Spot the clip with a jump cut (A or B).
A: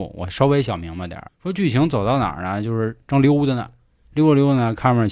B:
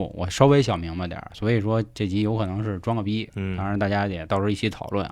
A